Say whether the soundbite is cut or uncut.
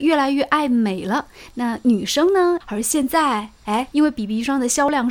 cut